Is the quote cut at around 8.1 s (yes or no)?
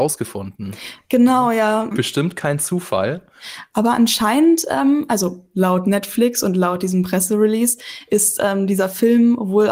no